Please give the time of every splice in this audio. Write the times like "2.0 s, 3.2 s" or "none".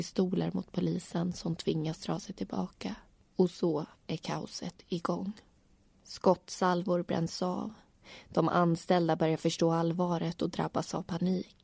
none